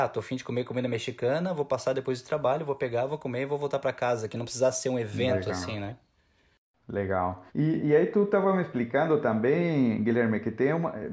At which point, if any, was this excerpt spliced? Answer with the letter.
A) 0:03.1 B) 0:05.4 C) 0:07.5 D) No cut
C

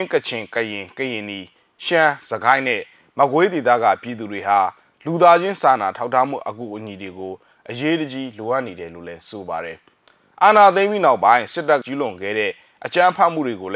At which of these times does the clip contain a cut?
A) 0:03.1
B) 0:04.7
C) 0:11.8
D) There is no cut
C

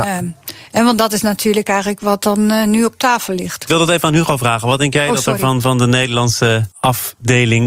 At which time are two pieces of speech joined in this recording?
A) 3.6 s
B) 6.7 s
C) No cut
B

